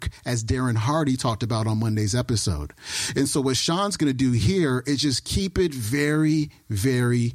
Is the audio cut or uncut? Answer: uncut